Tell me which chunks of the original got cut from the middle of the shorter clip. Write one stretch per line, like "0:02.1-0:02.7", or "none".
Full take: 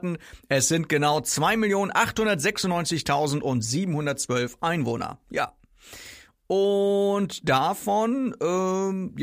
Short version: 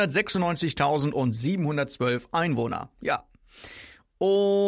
none